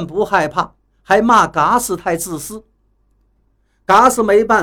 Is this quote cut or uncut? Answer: uncut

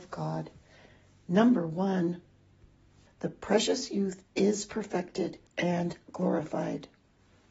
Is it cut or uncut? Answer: cut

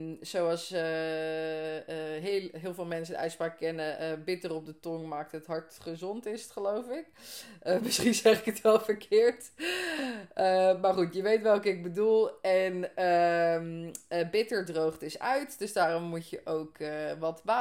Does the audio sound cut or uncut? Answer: uncut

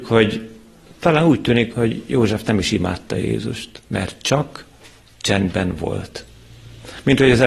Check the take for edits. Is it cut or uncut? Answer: cut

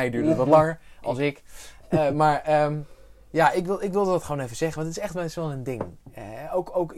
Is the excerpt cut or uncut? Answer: uncut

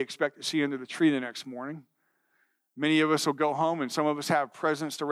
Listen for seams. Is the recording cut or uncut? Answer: uncut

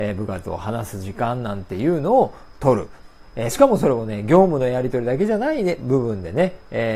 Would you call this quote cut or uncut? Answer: uncut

